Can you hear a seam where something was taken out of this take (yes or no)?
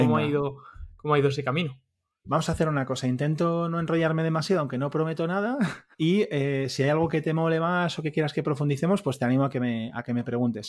yes